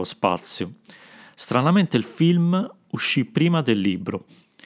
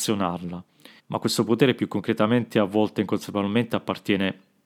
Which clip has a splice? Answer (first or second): second